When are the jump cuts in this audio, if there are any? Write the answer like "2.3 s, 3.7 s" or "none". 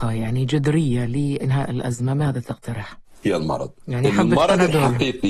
3.2 s

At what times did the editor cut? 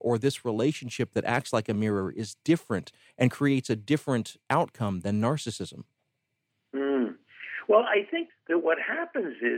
none

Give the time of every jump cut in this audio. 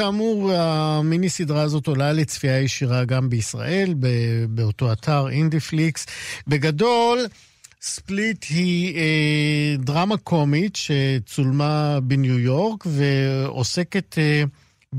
none

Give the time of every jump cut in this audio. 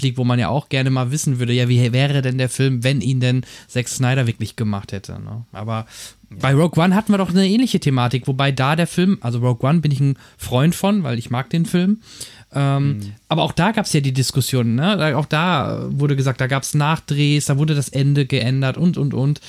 none

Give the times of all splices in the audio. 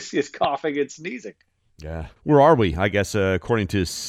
2.2 s

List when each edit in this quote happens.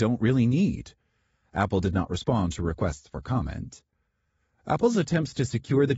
none

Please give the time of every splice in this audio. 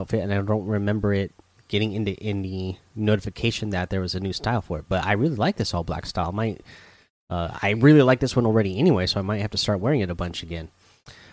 none

